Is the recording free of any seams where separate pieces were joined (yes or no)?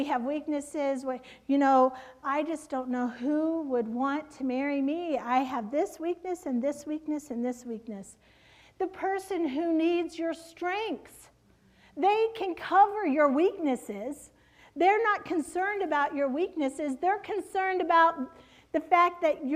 no